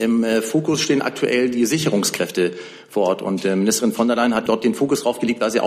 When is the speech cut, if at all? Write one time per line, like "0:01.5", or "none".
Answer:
0:04.5